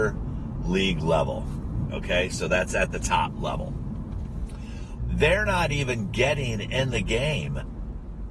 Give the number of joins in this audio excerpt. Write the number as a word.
two